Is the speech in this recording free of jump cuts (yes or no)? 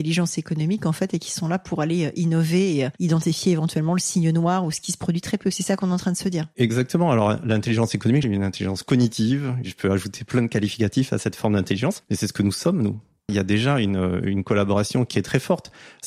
no